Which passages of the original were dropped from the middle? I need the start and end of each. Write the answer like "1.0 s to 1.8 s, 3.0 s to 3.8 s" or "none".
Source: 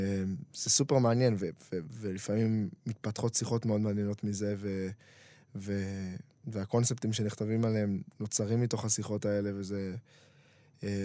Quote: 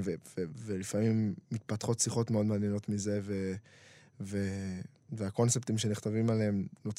none